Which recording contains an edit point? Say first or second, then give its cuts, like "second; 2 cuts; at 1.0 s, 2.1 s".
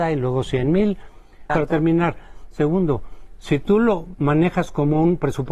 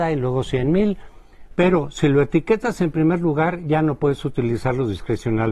first; 1 cut; at 1.5 s